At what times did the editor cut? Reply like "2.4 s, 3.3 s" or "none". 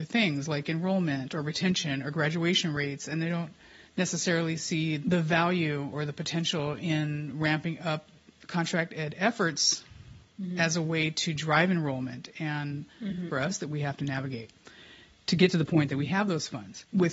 13.3 s